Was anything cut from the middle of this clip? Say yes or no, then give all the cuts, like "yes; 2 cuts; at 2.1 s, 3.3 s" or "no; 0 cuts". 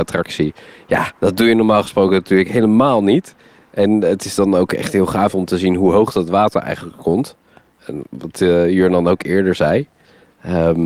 yes; 1 cut; at 1.2 s